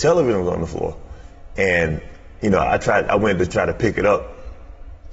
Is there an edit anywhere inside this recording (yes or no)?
no